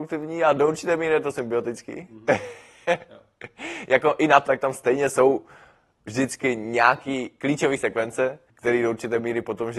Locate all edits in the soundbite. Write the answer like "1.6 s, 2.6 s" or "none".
4.5 s, 8.5 s

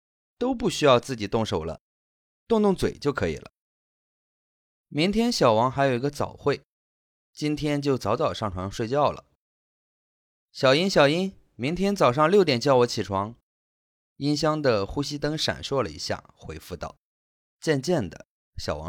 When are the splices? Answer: 14.0 s

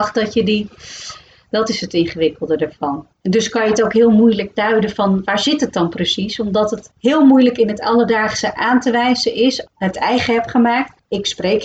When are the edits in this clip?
1.4 s, 9.6 s

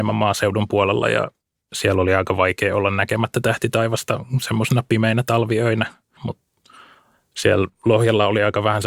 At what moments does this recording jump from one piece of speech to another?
6.2 s

